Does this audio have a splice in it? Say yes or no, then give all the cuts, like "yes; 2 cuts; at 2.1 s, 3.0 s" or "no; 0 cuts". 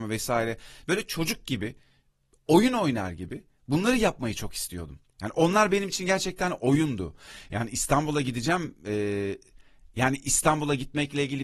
yes; 1 cut; at 5.1 s